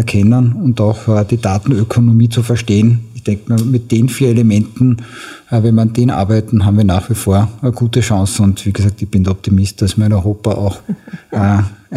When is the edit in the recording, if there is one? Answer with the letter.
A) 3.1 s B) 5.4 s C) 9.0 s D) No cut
D